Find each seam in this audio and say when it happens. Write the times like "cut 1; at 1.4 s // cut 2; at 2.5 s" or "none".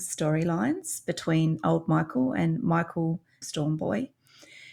cut 1; at 3.4 s